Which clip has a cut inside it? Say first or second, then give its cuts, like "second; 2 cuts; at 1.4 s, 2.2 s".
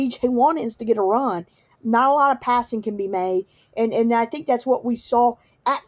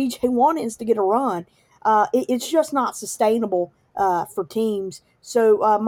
first; 1 cut; at 1.7 s